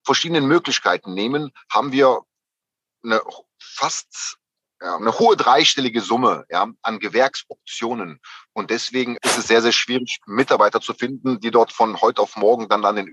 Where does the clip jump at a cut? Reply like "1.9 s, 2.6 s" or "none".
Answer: 5.0 s, 9.2 s